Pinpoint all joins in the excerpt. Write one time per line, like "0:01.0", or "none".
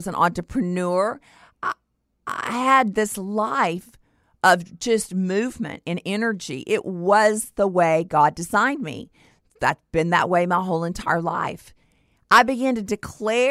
none